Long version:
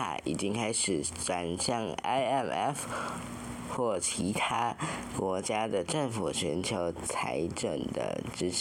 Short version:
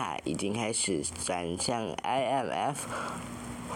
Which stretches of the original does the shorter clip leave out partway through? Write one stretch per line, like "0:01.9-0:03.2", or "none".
none